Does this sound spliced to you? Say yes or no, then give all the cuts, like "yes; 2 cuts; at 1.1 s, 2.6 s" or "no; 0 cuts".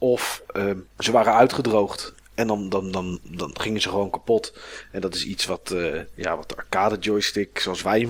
no; 0 cuts